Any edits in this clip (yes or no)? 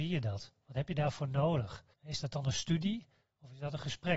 yes